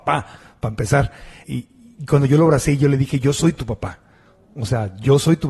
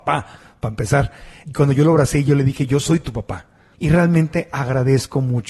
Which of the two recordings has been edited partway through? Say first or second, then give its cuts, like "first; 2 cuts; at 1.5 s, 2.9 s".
second; 2 cuts; at 1.4 s, 3.7 s